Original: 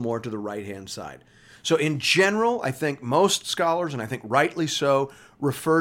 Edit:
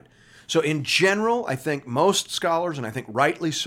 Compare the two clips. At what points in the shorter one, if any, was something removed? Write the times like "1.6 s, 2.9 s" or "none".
none